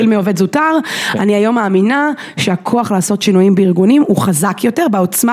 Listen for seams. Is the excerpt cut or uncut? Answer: uncut